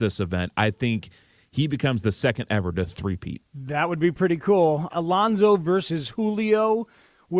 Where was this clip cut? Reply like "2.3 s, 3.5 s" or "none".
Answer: 4.9 s

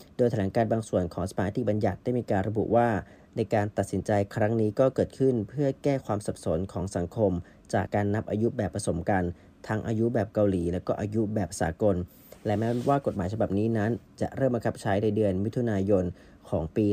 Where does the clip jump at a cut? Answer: 7.9 s

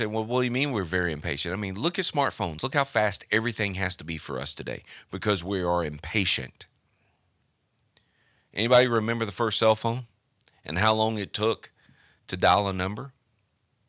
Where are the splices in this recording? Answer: none

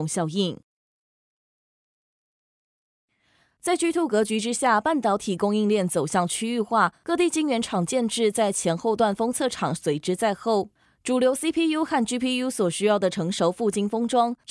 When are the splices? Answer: none

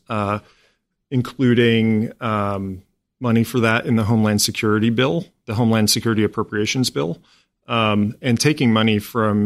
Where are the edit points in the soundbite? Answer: none

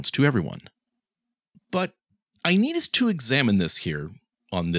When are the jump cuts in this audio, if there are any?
1.5 s

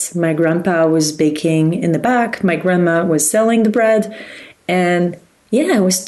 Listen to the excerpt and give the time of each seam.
none

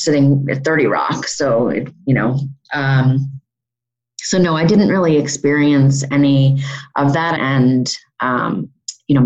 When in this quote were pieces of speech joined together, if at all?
7.4 s

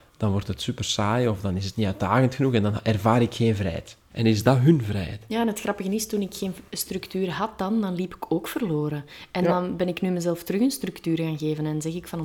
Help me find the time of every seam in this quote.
4.1 s

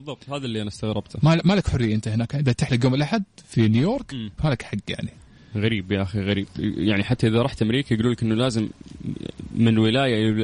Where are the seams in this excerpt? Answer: 4.4 s

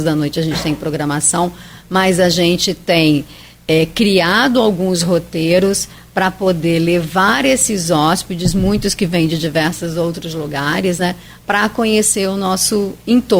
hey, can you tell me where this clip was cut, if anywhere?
none

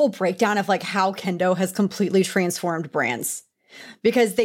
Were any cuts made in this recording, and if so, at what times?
none

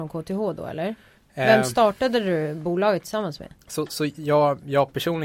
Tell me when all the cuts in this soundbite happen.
none

